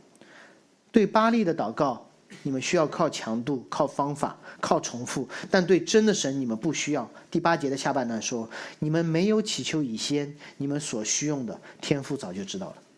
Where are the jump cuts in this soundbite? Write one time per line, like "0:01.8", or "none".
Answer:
0:04.6